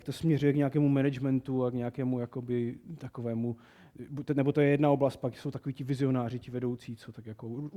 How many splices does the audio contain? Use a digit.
0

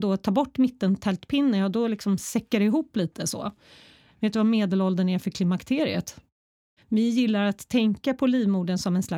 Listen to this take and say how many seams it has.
2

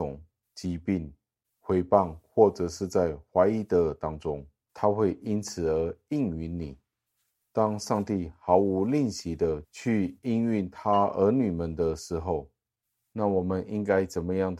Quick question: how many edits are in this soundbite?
1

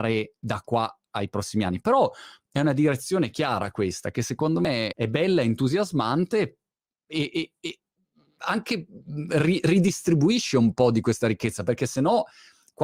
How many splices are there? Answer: 1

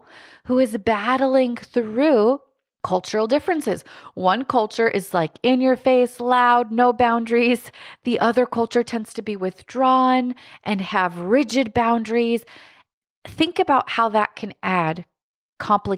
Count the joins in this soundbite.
0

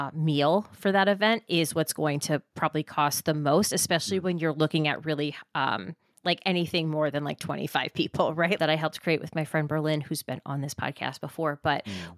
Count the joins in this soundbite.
1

